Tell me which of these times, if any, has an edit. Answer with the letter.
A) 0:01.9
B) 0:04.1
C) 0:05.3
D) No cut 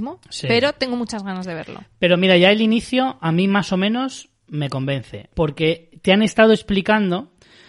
C